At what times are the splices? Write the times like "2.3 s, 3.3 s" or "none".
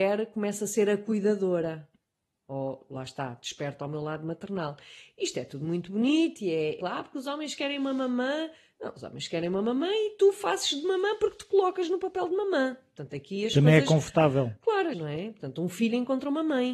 6.8 s, 14.9 s